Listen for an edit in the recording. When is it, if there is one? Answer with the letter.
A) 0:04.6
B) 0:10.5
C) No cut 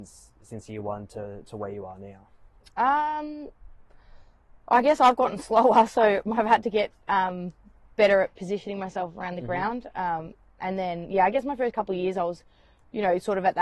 C